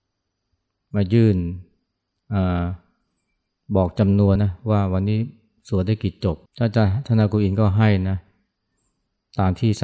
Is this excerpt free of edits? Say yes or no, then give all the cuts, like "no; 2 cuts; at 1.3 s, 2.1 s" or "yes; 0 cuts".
no; 2 cuts; at 4.4 s, 6.5 s